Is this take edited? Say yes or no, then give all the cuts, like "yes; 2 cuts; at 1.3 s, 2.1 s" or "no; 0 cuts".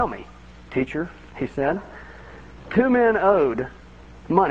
no; 0 cuts